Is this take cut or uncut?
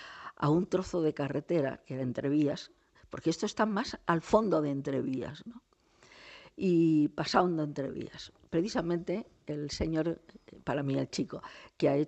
uncut